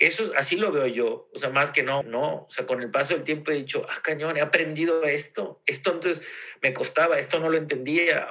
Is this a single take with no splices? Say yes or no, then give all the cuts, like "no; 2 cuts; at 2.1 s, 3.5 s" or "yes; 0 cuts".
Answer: no; 1 cut; at 2.0 s